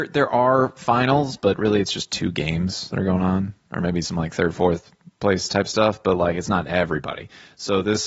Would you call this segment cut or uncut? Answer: uncut